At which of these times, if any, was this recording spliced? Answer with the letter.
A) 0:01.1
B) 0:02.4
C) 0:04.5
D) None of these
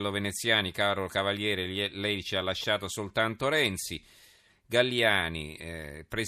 C